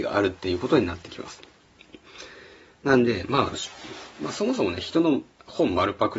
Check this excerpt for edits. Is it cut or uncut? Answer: uncut